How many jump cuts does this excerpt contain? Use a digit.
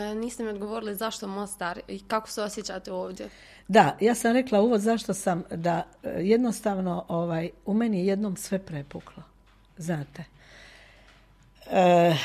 0